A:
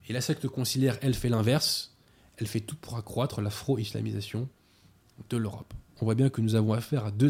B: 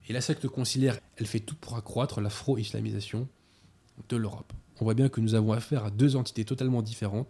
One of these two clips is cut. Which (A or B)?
B